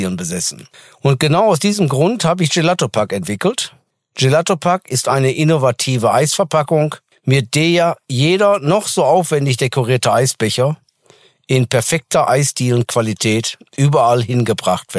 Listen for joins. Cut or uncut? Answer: uncut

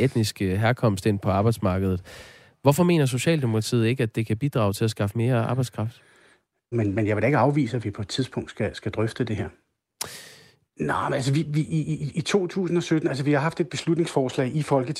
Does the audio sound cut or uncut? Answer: cut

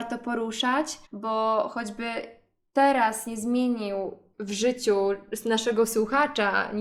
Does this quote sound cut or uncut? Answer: cut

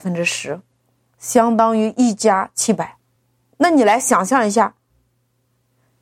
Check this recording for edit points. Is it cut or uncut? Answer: uncut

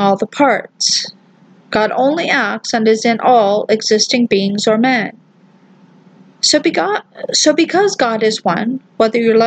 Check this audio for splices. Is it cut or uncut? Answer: uncut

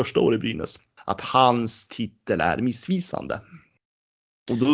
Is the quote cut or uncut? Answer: cut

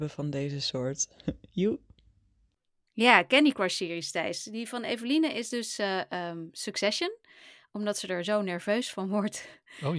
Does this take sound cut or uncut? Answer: uncut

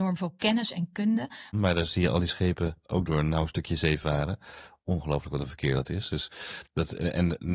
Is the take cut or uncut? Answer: cut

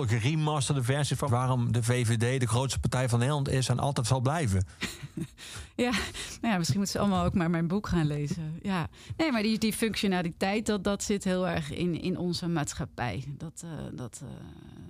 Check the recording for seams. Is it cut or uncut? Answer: cut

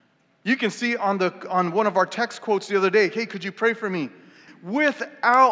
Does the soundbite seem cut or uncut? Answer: cut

